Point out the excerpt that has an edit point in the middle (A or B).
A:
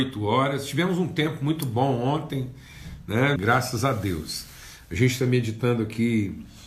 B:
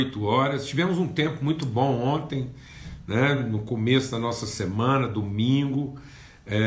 A